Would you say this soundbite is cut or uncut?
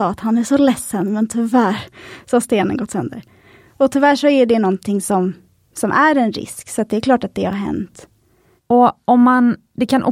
cut